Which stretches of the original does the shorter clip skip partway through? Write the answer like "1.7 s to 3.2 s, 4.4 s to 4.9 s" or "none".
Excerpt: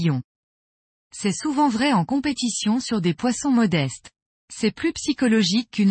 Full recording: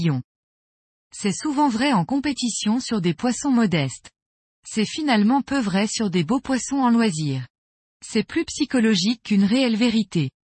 4.4 s to 7.9 s